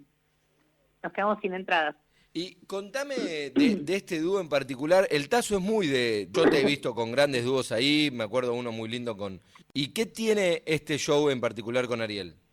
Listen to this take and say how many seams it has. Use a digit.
2